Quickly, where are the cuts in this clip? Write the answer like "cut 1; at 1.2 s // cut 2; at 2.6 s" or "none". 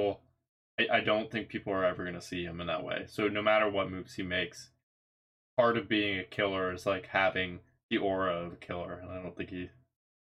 none